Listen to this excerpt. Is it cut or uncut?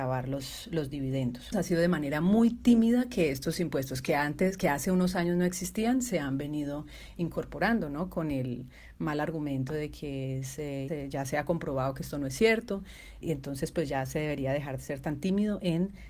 cut